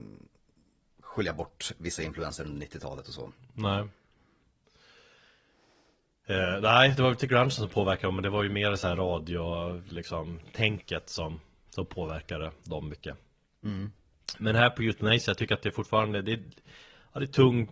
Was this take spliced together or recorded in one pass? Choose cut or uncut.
uncut